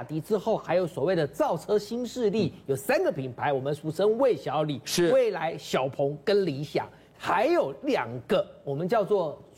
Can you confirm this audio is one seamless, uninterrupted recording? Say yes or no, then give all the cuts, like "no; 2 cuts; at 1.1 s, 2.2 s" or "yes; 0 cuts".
yes; 0 cuts